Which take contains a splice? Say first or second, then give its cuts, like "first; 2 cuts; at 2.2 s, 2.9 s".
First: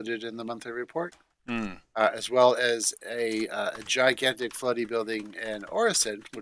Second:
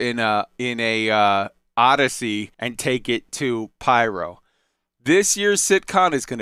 second; 1 cut; at 2.5 s